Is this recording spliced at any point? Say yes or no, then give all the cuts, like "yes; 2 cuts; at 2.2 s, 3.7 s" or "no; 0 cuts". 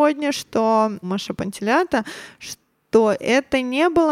yes; 1 cut; at 1.0 s